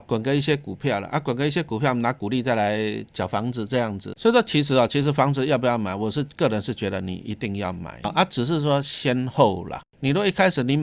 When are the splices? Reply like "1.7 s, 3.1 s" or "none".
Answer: 3.1 s